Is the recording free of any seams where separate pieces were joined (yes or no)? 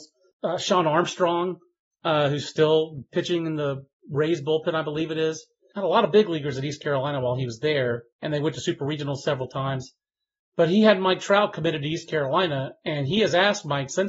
yes